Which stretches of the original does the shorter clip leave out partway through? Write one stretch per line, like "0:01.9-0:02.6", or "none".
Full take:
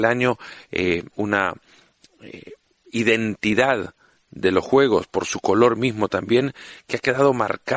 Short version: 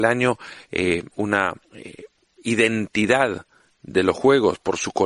0:01.6-0:02.1